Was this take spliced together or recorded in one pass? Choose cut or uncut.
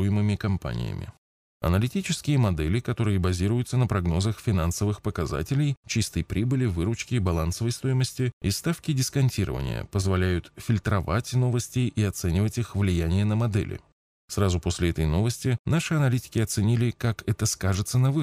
cut